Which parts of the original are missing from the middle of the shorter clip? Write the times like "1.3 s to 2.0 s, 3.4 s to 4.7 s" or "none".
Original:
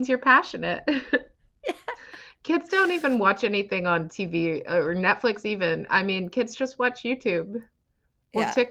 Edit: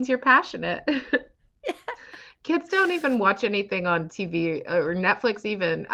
none